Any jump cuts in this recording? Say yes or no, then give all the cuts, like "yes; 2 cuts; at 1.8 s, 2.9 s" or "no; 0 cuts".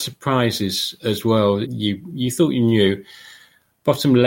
yes; 1 cut; at 1.6 s